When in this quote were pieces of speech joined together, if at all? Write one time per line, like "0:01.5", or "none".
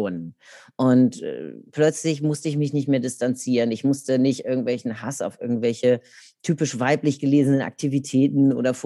none